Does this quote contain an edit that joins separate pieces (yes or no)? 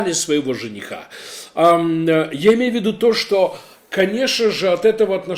no